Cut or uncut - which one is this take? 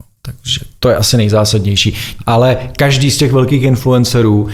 cut